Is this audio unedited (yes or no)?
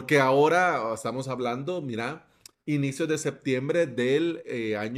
yes